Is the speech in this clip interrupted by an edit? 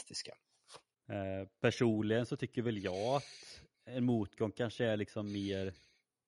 yes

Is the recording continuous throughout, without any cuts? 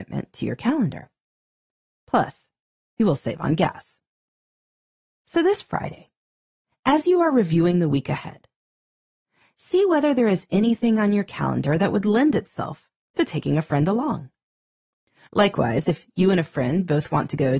no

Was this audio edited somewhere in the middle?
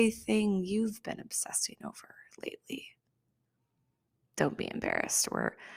no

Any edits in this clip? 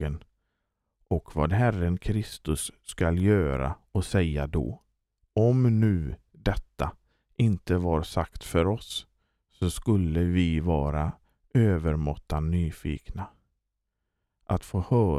yes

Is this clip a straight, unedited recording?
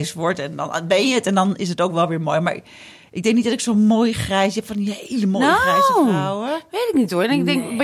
yes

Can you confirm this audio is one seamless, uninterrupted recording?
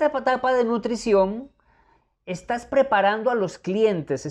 yes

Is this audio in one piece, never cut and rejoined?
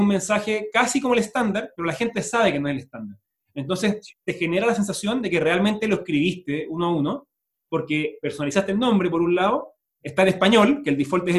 yes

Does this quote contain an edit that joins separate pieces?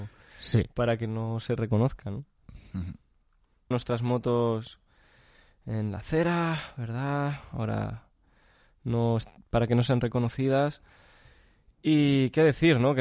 yes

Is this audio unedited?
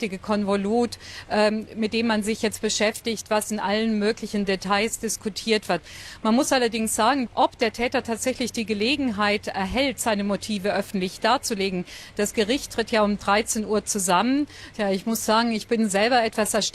no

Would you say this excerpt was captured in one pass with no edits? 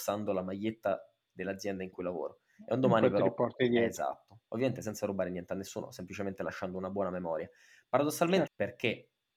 no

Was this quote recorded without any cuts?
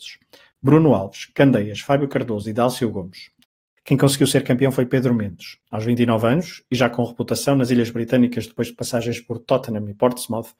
no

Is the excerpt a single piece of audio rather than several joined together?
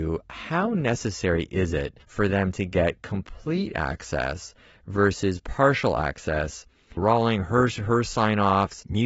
no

